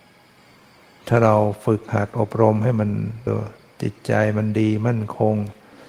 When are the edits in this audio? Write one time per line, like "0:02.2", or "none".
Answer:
0:03.3